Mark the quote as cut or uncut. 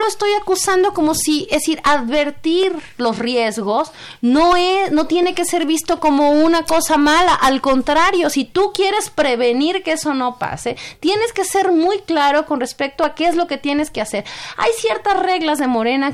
uncut